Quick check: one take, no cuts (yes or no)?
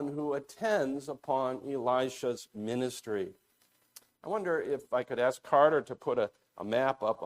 yes